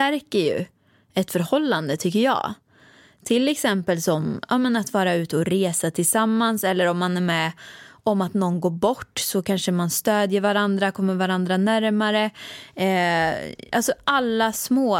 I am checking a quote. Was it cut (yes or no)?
no